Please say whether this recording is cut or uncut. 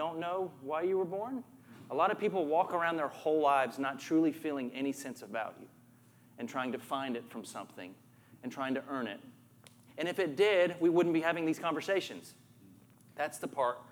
cut